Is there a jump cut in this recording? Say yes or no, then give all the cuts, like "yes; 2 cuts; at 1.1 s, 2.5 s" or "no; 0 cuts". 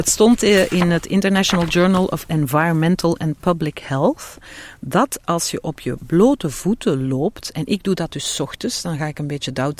no; 0 cuts